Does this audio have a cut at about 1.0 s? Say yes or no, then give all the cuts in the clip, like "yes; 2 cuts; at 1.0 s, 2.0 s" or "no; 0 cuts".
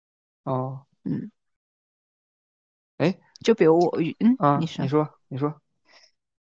yes; 1 cut; at 1.0 s